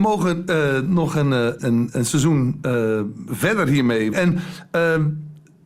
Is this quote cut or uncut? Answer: cut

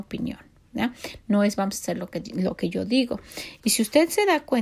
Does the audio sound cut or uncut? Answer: cut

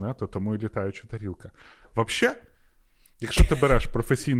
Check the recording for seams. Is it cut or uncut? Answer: uncut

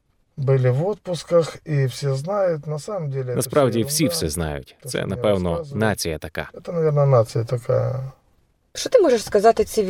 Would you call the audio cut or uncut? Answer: uncut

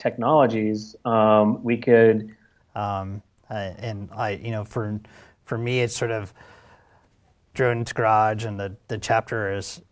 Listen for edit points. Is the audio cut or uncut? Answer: cut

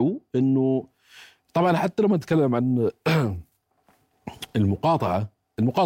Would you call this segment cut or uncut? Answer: uncut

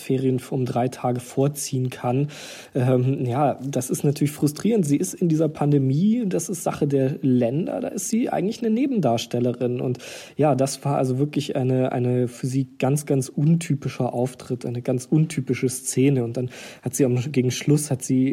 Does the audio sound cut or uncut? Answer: uncut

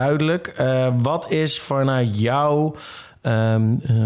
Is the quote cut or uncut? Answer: uncut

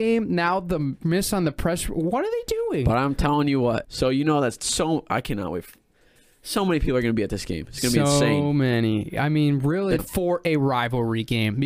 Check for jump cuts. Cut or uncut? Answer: cut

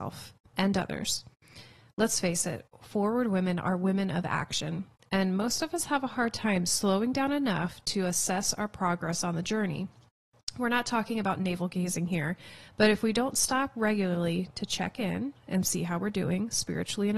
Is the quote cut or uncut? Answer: uncut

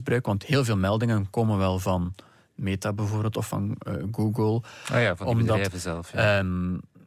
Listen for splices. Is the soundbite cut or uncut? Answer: uncut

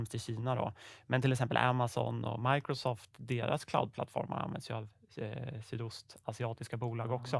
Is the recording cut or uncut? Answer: uncut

